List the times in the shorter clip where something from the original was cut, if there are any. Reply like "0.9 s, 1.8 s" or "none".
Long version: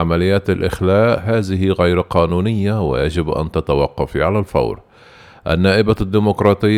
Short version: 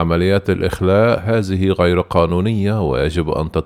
none